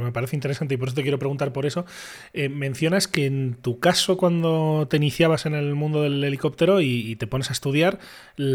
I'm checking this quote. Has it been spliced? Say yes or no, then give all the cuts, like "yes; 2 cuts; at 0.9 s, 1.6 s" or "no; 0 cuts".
no; 0 cuts